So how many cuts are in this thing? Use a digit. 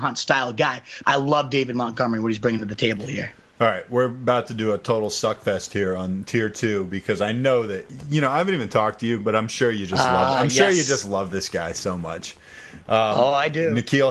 1